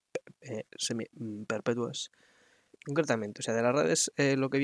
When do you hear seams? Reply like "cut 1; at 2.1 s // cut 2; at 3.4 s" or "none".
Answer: cut 1; at 2.7 s